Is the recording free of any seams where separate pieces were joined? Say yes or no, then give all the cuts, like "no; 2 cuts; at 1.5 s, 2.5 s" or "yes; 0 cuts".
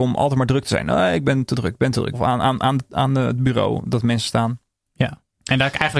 no; 1 cut; at 2.1 s